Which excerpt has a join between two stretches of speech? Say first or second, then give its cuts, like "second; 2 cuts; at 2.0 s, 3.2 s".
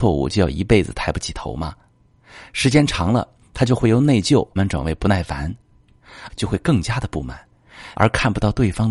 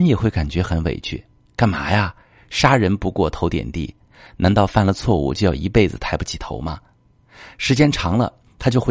first; 3 cuts; at 4.6 s, 6.3 s, 7.9 s